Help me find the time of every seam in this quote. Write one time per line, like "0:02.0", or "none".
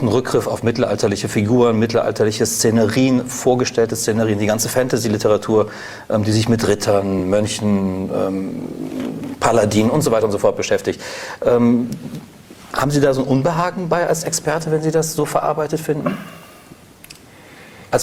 none